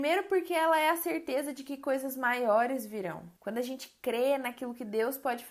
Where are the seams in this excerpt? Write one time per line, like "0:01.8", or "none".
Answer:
0:03.4